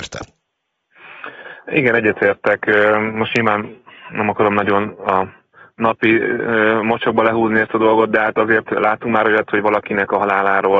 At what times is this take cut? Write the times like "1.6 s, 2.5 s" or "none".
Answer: none